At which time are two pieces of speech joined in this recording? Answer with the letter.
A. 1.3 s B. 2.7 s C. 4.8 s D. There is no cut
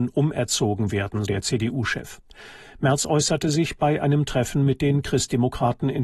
A